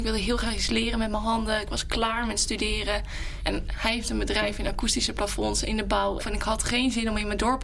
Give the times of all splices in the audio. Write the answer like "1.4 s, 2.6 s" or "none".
3.4 s, 6.2 s